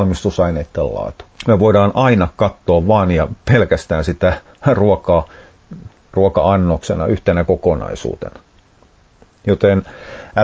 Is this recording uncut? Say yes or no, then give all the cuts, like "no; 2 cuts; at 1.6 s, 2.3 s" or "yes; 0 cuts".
yes; 0 cuts